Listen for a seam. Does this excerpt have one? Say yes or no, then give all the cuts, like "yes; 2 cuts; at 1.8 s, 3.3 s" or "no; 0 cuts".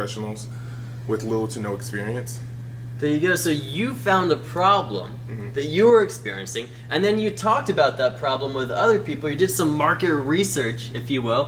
no; 0 cuts